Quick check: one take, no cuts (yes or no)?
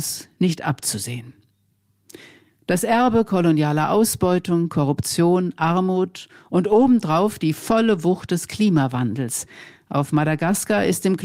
yes